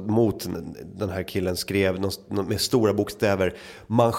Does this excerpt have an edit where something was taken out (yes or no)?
no